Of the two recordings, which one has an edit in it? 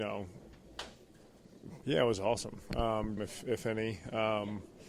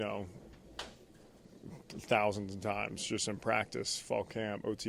first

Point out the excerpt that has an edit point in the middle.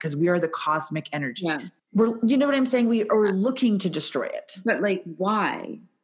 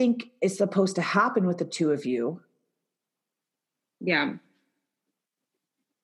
first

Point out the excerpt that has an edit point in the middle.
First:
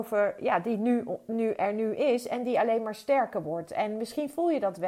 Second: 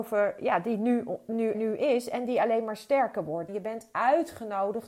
second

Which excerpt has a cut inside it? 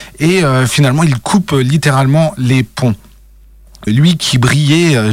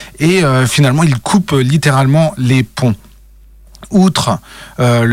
first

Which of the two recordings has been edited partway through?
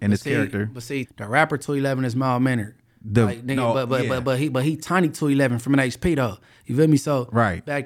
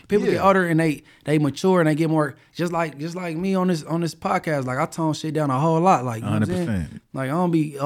first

